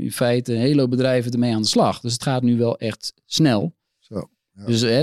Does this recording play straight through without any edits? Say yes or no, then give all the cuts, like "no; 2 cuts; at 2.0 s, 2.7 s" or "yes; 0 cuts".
yes; 0 cuts